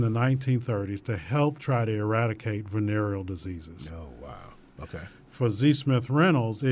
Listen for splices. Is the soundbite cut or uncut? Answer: cut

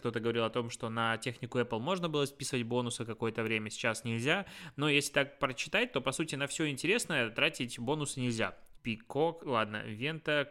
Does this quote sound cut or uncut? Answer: cut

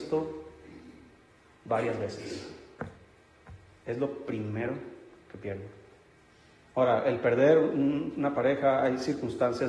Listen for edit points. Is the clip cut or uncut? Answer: uncut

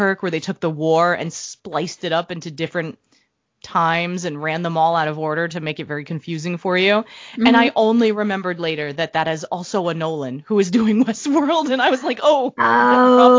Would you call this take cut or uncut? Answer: uncut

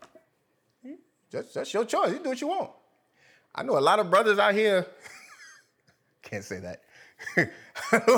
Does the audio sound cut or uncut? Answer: uncut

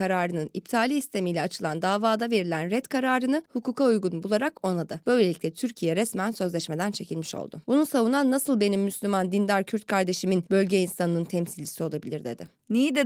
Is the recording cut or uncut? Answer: cut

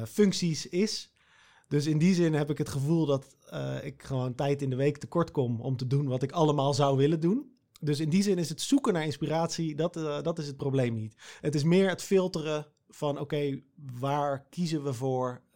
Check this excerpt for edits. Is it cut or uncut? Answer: uncut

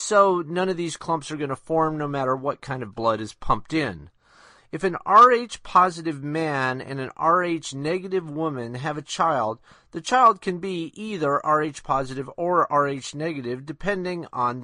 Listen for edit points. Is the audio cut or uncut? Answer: cut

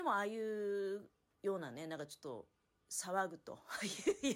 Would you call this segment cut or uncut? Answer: uncut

